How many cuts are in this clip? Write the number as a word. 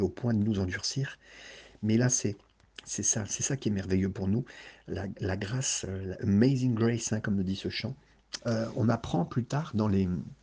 one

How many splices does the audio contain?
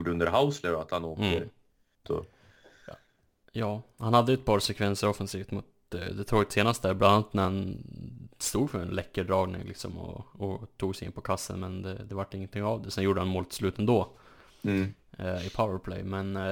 one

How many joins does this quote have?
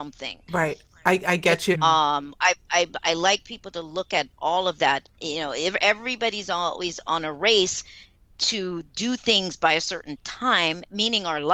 one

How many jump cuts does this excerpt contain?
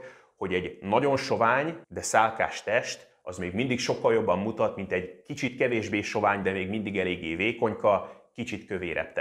one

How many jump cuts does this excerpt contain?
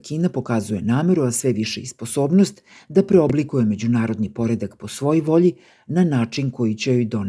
zero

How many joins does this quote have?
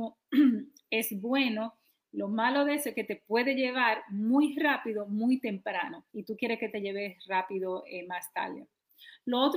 one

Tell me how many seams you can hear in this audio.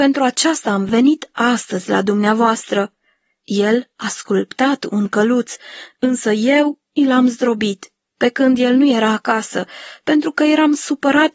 zero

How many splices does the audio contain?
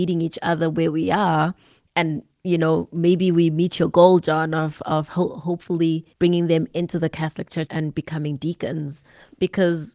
two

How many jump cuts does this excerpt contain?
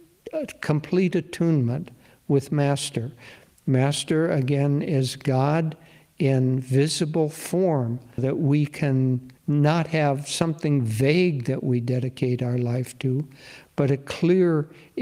two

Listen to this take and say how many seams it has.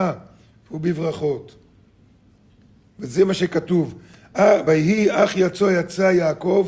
zero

